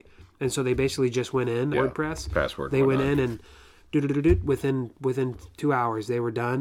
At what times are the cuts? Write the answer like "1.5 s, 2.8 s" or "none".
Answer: 1.7 s